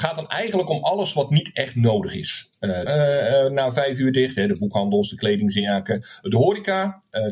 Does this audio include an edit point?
yes; 1 cut; at 2.9 s

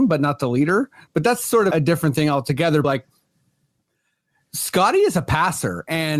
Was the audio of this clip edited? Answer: yes; 2 cuts; at 1.7 s, 2.8 s

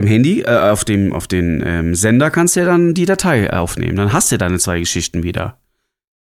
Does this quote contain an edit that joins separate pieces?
yes; 1 cut; at 1.1 s

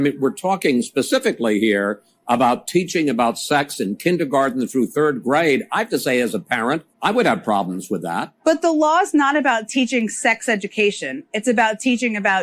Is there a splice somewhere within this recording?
yes; 2 cuts; at 6.9 s, 8.4 s

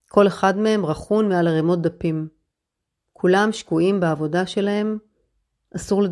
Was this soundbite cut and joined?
no; 0 cuts

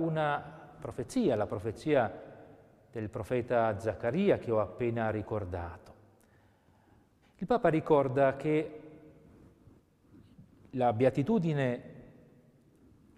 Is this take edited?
yes; 1 cut; at 7.2 s

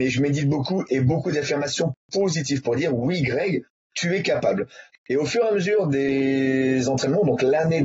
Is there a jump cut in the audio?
yes; 1 cut; at 4.9 s

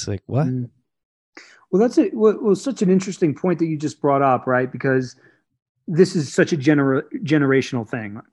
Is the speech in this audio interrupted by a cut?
no; 0 cuts

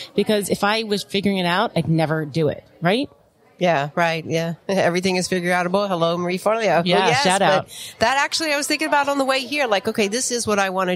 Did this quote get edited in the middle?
no; 0 cuts

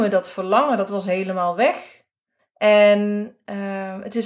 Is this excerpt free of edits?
no; 1 cut; at 2.4 s

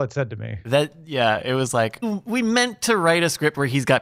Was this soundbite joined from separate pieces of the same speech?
yes; 1 cut; at 2.0 s

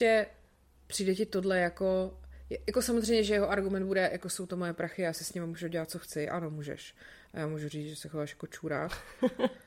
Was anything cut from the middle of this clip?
no; 0 cuts

